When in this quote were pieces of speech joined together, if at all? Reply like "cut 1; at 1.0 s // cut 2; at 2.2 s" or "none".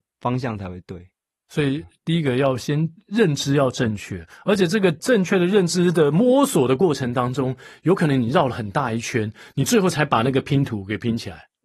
none